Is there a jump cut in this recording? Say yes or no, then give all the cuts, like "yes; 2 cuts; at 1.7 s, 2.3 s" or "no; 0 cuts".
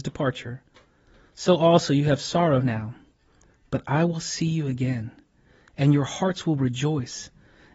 no; 0 cuts